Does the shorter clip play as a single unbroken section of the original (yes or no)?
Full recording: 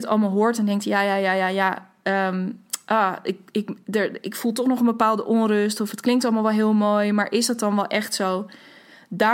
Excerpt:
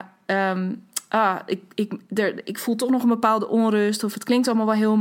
yes